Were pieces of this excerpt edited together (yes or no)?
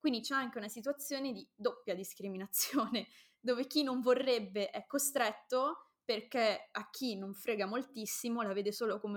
no